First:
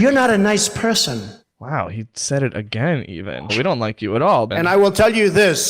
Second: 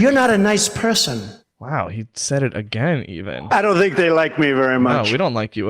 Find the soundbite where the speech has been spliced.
first; 2 cuts; at 3.5 s, 4.5 s

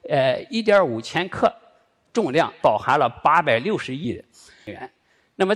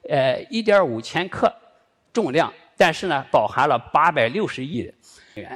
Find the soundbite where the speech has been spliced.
first; 1 cut; at 2.6 s

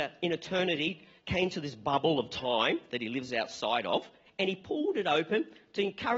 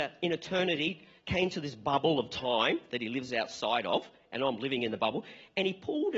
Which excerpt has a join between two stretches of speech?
first; 1 cut; at 4.3 s

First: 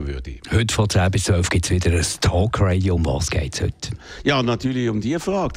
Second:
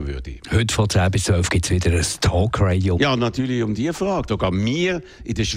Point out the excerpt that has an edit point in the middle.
second; 2 cuts; at 3.0 s, 4.3 s

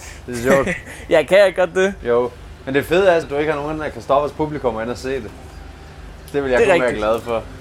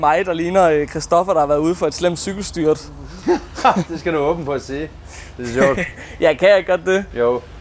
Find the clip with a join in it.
first; 1 cut; at 3.2 s

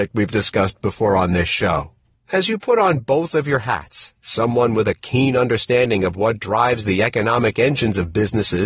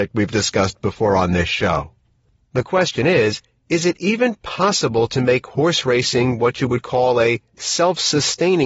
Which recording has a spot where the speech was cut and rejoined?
first; 1 cut; at 2.1 s

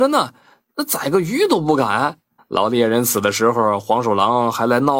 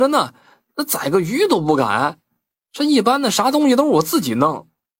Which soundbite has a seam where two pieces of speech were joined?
first; 1 cut; at 2.4 s

